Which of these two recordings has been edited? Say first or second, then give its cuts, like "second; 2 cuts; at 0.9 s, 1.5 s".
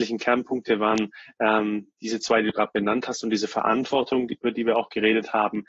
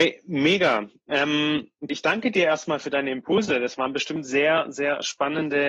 second; 1 cut; at 1.9 s